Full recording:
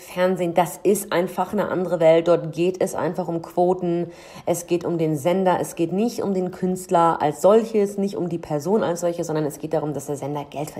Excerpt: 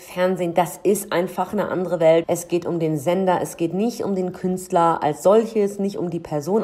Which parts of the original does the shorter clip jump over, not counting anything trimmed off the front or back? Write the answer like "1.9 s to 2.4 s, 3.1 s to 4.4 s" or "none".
2.2 s to 4.4 s